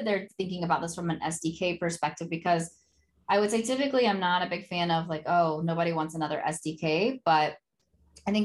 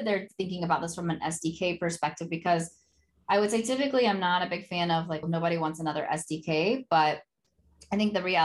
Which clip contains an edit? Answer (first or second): second